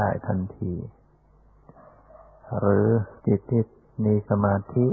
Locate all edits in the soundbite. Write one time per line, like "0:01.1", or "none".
0:03.2